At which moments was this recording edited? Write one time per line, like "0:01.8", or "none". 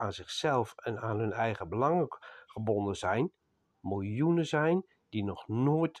0:03.7